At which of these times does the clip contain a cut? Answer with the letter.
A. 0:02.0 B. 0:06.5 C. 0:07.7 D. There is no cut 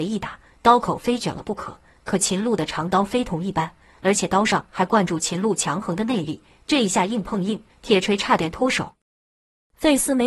C